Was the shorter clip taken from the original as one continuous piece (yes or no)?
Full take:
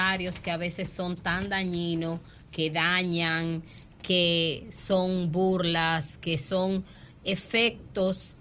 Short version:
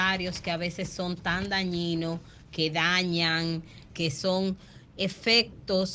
no